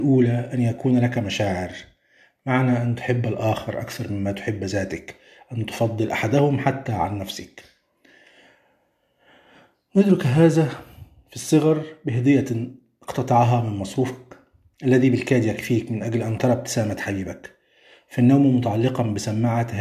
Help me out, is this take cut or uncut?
uncut